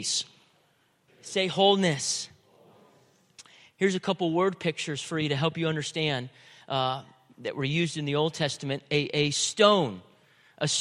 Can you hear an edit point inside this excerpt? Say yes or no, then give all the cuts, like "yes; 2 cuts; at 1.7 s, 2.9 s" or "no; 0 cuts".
yes; 1 cut; at 1.1 s